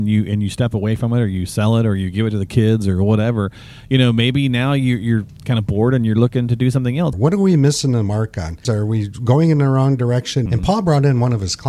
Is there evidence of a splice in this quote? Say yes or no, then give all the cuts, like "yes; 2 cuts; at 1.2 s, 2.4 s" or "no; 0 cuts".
yes; 3 cuts; at 7.1 s, 8.6 s, 10.5 s